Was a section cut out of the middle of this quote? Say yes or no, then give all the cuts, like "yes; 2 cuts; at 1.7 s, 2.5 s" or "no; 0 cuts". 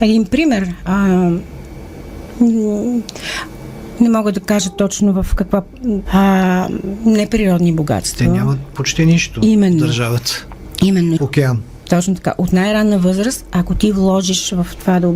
yes; 2 cuts; at 6.1 s, 11.2 s